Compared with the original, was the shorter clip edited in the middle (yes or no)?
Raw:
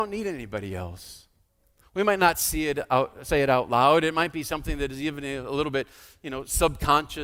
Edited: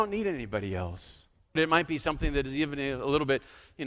yes